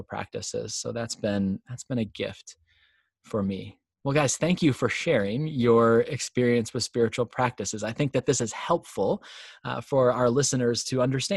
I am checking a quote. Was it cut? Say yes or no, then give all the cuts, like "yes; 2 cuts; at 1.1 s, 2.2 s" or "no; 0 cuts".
no; 0 cuts